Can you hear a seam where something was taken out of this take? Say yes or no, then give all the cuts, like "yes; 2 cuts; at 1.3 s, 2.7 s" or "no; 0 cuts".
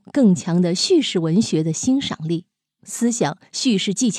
yes; 1 cut; at 2.8 s